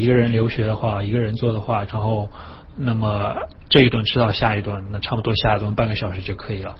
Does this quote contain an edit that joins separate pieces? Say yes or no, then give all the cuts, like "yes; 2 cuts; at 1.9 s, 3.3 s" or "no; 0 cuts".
yes; 1 cut; at 1.9 s